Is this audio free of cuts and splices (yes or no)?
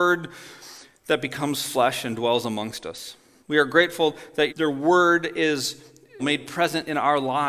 no